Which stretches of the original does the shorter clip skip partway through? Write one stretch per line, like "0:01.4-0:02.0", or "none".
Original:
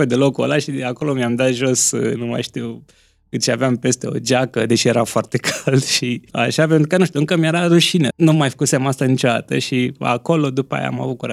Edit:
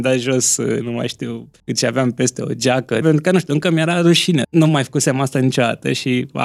0:02.9-0:03.2
0:04.7-0:06.7